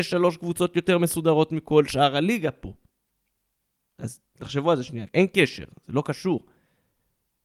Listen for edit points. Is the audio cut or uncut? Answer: cut